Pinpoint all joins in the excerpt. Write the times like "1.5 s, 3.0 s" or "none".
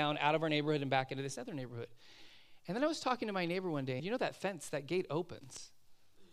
4.0 s